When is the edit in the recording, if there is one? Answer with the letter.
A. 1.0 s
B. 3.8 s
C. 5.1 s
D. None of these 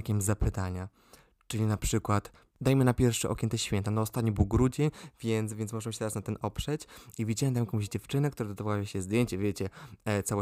D